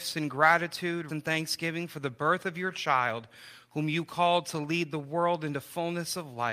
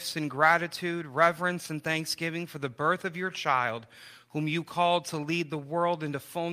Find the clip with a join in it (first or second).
first